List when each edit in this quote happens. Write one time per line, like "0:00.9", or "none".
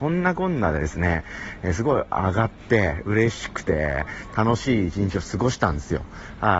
none